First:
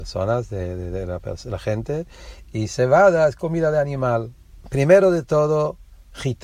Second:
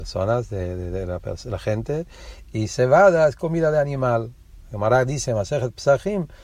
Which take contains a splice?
first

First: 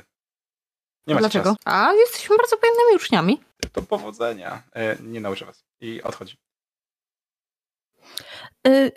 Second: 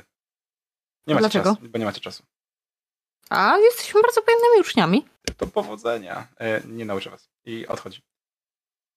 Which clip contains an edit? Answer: first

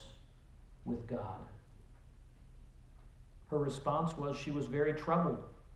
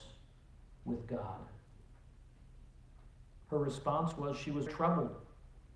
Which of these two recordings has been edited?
second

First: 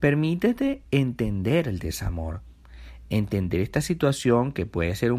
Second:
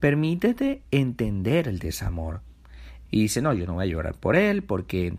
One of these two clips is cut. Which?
second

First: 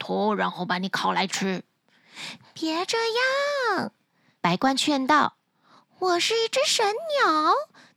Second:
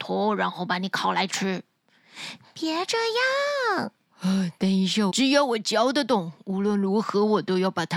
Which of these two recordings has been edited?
second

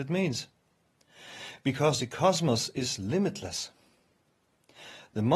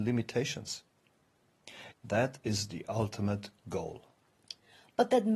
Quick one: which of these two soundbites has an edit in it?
second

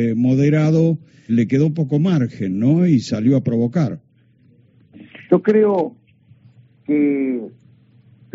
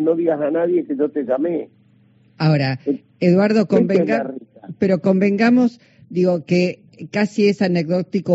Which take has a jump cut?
first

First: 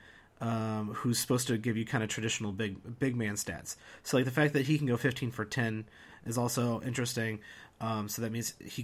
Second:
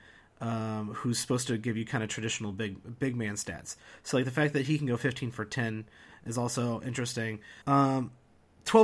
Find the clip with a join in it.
second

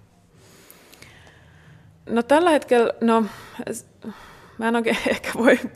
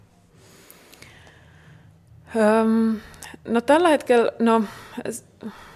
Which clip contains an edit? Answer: first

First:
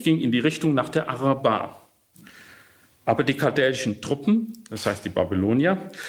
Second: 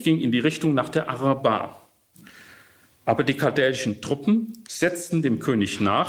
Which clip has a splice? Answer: second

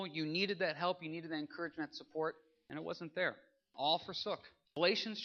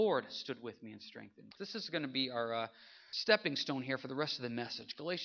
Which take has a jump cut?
second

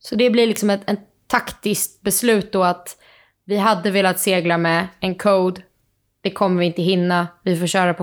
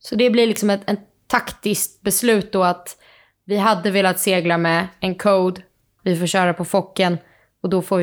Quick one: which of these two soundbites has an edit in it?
second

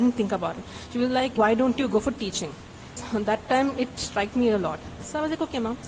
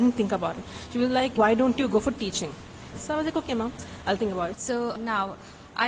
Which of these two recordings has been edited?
second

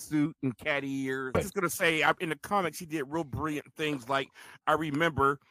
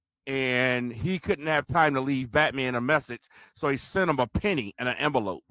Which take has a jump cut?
first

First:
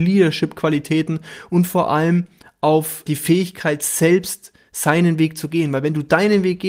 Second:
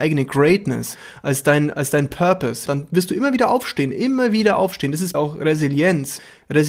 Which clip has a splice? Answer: second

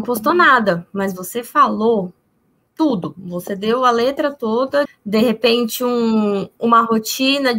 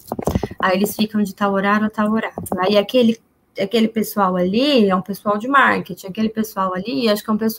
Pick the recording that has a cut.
first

